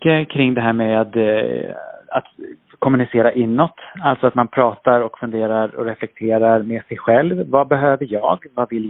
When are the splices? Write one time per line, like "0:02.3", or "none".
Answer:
none